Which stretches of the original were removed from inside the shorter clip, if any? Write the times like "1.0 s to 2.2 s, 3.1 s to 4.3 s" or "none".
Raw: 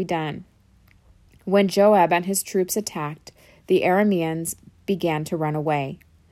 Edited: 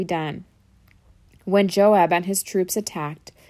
none